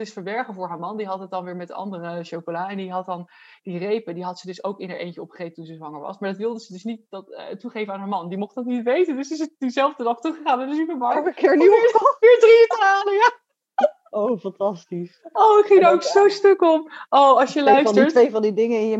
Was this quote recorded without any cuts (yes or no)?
yes